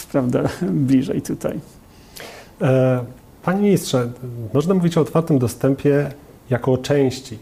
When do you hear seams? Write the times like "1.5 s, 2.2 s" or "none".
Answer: none